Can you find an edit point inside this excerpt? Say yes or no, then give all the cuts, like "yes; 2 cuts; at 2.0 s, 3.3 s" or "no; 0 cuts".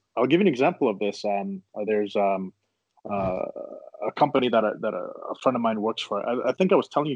no; 0 cuts